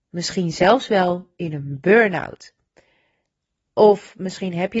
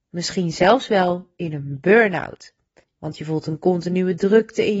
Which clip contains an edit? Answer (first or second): second